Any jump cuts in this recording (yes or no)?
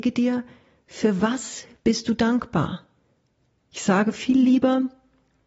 yes